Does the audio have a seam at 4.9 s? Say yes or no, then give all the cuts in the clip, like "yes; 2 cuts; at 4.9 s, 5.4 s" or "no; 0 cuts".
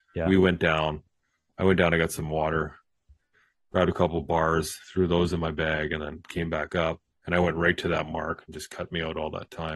no; 0 cuts